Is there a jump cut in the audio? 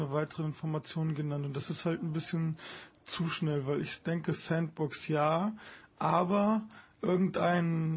no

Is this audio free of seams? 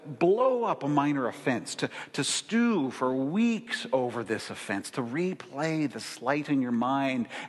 yes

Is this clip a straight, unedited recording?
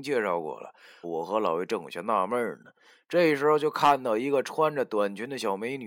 no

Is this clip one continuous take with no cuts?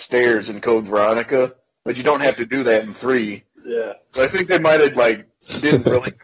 no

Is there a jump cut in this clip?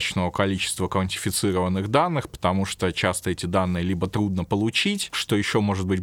yes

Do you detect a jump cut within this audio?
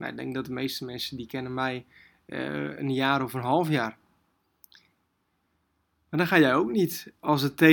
no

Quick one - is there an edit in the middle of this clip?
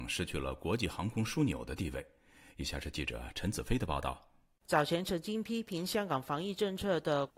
no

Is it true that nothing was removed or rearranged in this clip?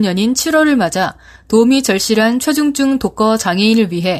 yes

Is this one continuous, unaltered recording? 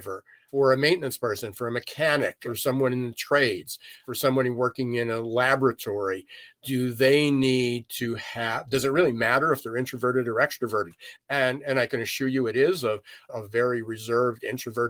no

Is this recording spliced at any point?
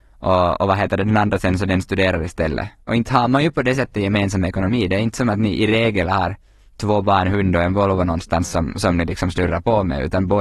no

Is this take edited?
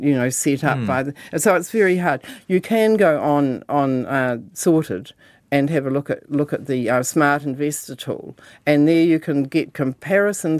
no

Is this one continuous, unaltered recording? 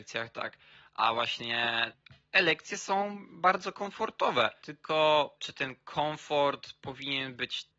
no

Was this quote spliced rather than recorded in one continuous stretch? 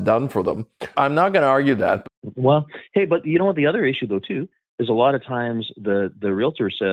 yes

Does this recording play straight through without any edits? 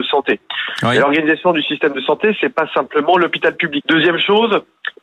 no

